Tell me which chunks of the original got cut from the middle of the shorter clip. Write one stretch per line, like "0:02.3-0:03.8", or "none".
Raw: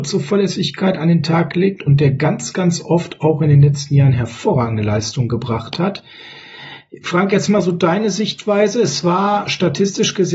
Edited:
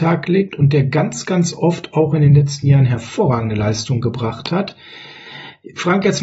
none